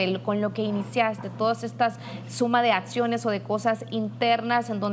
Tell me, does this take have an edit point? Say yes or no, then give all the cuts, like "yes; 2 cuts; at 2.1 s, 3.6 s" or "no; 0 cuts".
no; 0 cuts